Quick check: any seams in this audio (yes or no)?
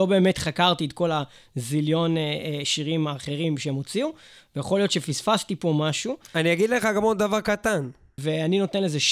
yes